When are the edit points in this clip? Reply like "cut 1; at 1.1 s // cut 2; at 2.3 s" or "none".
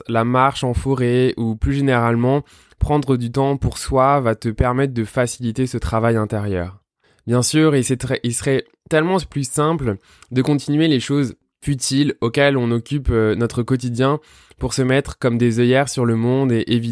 none